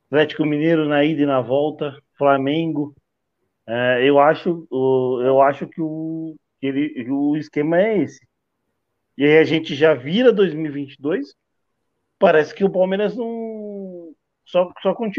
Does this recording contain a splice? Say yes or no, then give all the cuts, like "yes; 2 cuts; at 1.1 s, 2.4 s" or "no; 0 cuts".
no; 0 cuts